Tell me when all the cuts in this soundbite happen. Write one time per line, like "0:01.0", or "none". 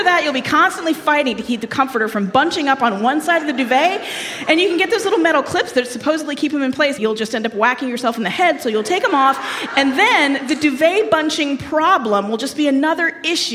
0:07.0